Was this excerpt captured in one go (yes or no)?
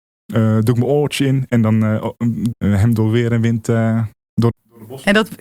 no